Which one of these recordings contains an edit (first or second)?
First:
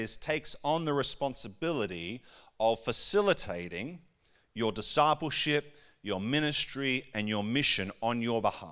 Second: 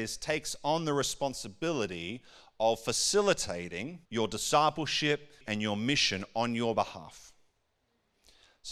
second